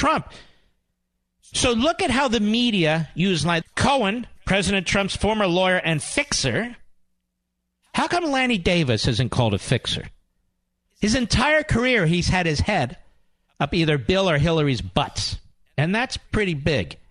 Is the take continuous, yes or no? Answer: no